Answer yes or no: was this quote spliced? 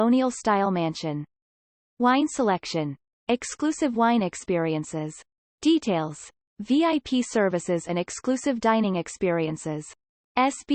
no